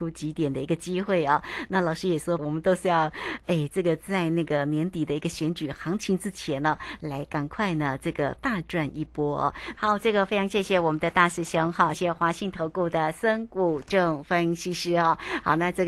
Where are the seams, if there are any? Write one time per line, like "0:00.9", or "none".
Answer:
0:02.4
0:09.7
0:11.9